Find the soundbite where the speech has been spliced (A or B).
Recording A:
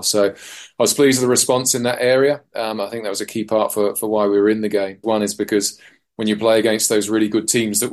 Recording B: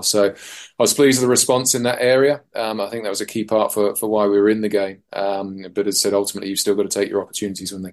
A